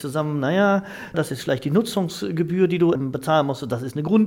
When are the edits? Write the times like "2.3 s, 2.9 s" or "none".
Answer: 1.1 s, 3.0 s